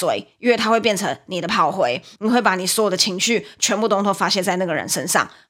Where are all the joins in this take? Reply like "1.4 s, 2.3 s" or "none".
none